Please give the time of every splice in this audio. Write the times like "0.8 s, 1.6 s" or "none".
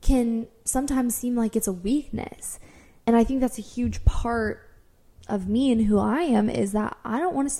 3.0 s

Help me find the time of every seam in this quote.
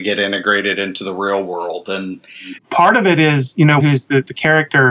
2.6 s, 3.8 s

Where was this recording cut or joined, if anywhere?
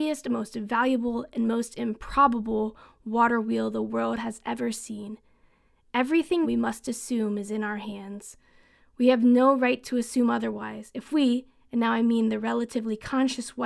6.4 s

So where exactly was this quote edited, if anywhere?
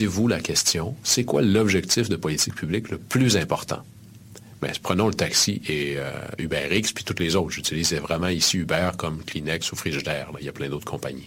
none

